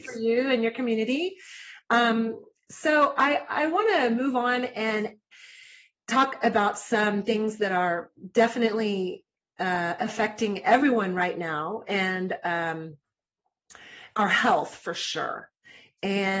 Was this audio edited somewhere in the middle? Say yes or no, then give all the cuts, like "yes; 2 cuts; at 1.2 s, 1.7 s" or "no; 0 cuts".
no; 0 cuts